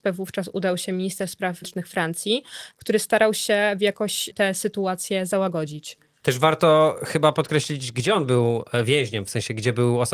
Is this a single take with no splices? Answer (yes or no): no